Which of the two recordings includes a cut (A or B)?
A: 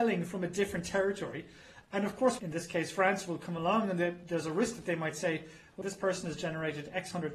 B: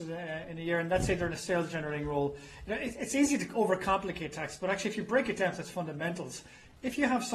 A